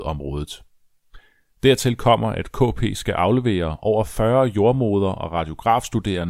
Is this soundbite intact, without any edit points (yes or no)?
yes